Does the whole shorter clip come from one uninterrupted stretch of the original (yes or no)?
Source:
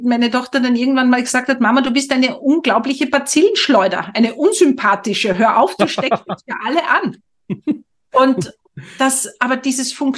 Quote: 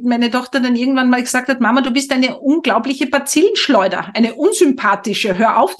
yes